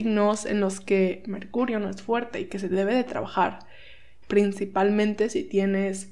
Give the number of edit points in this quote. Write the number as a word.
one